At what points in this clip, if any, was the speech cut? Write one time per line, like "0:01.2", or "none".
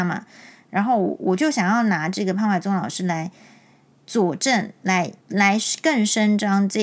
0:05.2